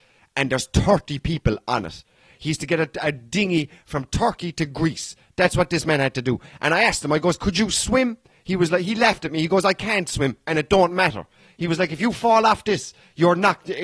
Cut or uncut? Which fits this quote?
uncut